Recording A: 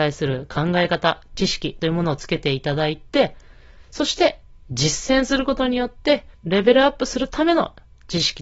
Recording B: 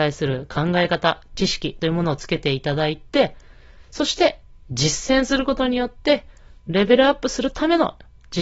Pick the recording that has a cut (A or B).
A